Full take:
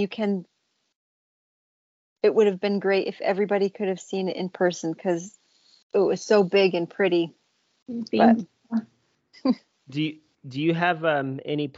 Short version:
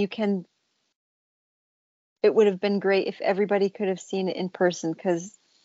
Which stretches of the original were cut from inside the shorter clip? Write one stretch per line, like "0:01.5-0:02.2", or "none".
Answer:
none

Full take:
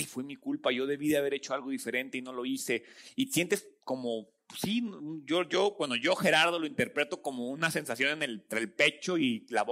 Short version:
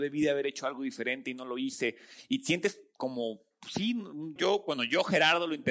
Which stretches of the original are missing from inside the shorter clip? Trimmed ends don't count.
0:05.2-0:05.5

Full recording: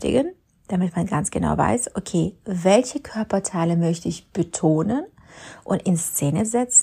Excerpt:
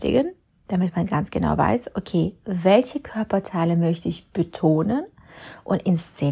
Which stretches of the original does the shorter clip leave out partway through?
none

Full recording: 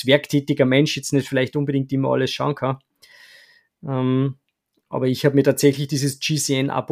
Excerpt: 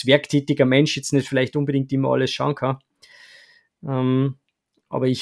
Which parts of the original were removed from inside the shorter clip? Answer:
none

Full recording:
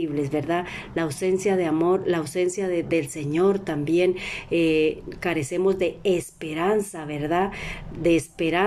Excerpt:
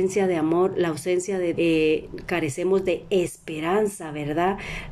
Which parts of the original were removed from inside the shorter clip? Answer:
0:02.8-0:04.5

